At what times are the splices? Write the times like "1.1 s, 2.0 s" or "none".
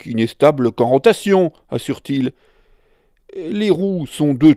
none